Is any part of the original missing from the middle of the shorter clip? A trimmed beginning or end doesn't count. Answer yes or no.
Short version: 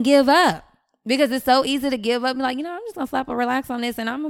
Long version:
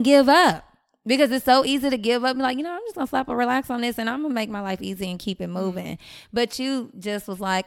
no